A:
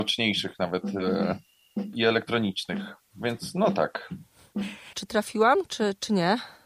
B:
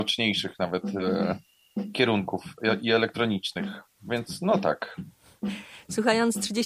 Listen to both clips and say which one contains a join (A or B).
A